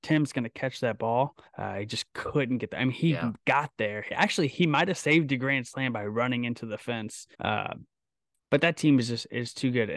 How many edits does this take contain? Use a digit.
2